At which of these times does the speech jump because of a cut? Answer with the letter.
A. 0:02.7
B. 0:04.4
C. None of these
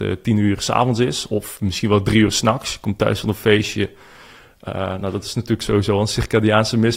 C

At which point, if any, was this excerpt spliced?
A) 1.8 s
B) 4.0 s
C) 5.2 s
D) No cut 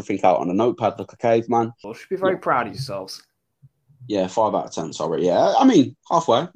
A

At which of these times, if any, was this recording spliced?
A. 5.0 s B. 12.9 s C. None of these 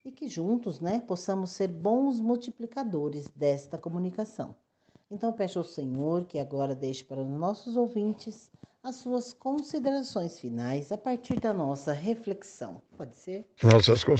B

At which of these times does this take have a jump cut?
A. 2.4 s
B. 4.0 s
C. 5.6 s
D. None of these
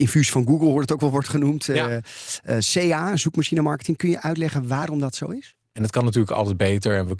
C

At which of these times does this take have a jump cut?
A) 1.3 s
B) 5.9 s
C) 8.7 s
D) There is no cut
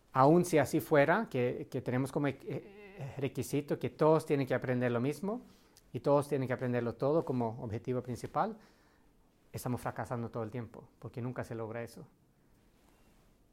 D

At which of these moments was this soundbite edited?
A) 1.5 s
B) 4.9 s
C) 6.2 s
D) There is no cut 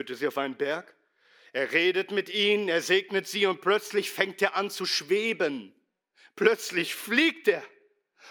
D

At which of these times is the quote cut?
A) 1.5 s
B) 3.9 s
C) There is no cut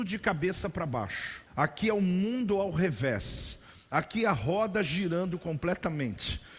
A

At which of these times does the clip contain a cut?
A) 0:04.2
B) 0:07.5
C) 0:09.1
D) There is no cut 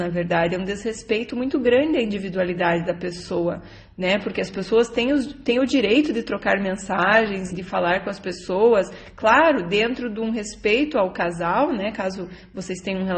B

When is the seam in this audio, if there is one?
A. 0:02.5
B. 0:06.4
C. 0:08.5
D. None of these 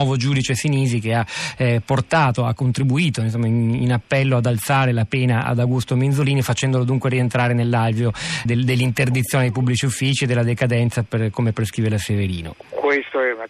C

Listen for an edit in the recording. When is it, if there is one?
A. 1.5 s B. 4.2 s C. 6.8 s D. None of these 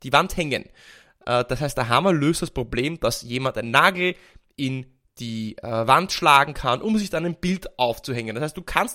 D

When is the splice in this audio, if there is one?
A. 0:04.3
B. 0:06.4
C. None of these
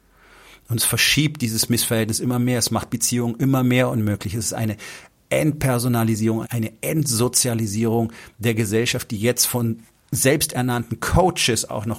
B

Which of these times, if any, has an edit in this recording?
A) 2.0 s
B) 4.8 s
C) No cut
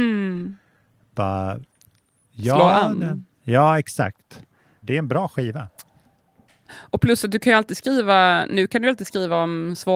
B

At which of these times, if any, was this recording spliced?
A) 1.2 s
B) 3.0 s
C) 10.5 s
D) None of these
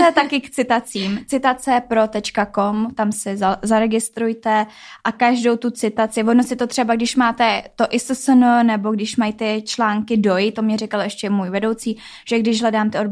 D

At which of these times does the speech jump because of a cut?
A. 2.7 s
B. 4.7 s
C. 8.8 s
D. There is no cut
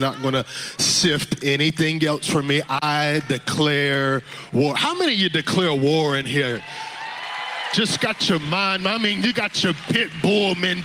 D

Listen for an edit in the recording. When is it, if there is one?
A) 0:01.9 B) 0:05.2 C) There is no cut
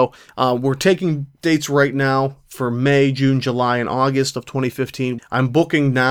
B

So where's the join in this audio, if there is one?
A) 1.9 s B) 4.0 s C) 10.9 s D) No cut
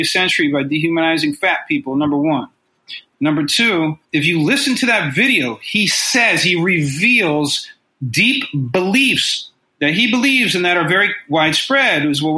B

